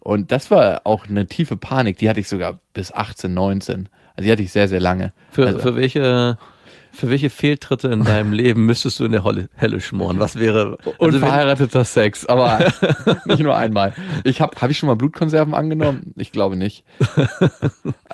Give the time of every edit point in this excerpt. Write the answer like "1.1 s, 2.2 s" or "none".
14.5 s